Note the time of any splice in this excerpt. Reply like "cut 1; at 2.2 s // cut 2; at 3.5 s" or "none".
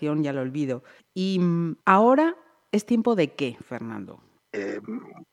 cut 1; at 1.8 s